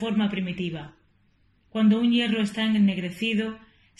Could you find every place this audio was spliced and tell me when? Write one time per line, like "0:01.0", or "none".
0:01.5